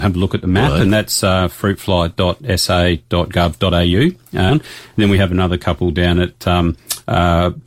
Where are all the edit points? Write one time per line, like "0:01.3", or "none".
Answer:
0:04.5